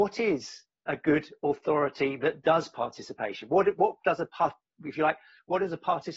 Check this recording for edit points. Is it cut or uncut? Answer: uncut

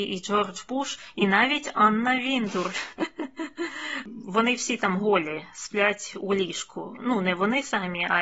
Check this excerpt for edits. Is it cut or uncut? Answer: uncut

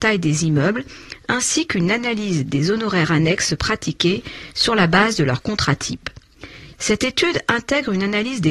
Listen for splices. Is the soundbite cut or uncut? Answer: cut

